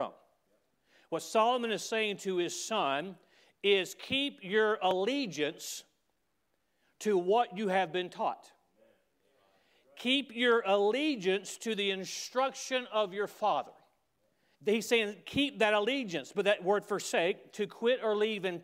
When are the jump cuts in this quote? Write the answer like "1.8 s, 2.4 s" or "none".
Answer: 14.5 s